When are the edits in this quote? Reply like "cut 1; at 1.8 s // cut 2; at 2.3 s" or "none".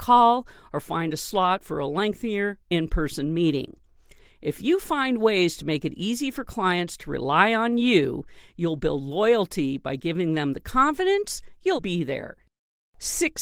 cut 1; at 11.8 s